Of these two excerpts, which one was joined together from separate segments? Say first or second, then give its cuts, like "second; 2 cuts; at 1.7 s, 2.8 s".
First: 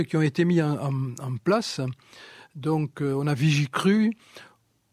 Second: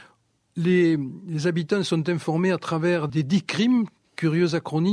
second; 1 cut; at 3.1 s